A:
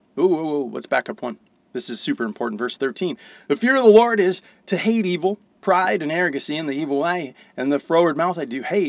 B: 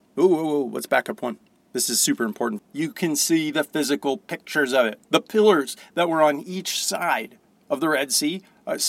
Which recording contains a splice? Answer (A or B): B